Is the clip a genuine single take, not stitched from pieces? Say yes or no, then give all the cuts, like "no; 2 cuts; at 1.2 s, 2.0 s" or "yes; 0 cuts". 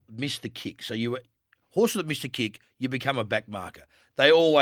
yes; 0 cuts